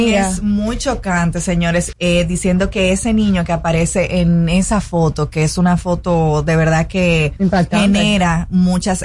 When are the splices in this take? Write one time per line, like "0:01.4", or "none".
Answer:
0:01.9